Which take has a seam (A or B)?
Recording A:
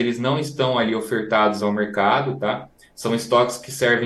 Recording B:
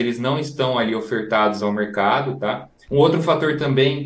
B